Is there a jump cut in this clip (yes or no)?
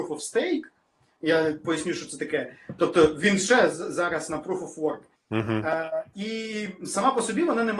yes